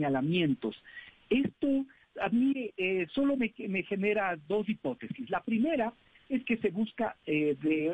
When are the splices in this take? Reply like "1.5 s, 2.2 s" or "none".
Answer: none